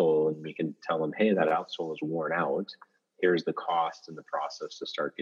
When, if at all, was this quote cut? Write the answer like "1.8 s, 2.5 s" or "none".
none

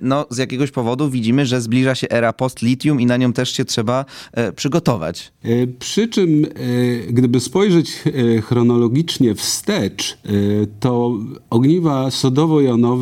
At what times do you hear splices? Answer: 5.4 s

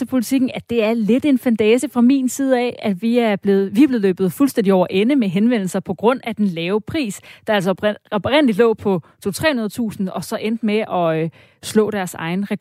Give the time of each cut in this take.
none

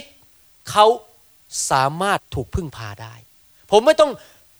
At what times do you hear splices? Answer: 2.2 s

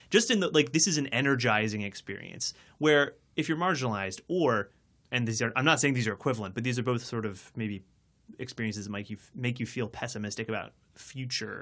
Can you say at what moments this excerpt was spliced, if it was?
none

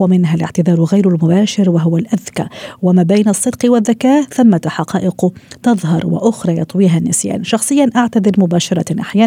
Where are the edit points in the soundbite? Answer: none

